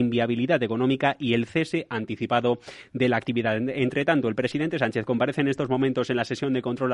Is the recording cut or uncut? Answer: uncut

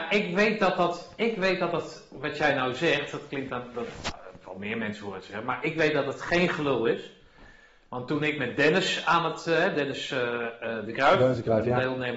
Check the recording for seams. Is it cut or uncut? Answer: uncut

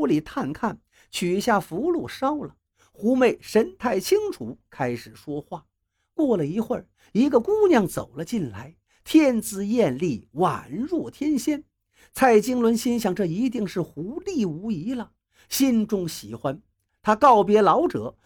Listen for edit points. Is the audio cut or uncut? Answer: uncut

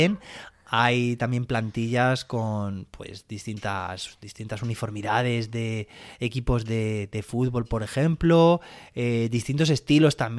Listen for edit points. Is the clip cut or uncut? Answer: uncut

